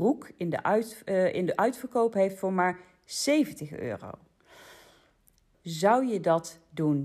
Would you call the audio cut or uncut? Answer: cut